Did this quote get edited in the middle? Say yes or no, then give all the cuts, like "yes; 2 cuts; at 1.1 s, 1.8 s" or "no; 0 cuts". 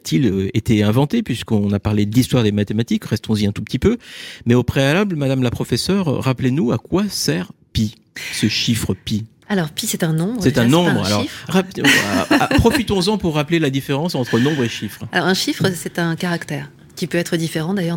yes; 1 cut; at 11.5 s